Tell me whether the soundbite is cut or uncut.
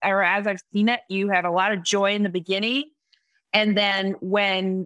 uncut